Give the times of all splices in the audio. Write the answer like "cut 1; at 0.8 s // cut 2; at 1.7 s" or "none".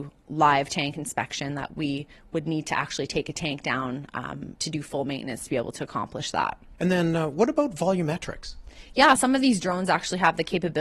cut 1; at 9.2 s